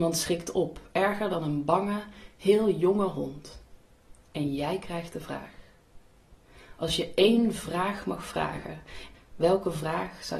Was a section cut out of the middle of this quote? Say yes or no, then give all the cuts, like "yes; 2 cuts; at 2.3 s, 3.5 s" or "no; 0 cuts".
yes; 1 cut; at 9.1 s